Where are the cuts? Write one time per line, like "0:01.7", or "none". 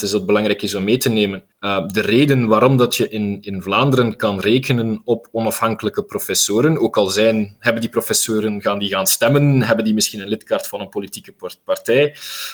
0:01.5